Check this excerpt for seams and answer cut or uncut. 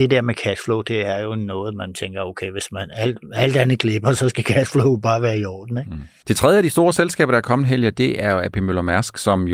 cut